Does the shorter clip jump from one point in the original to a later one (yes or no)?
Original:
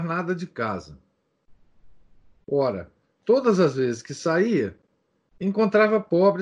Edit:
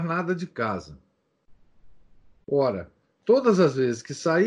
no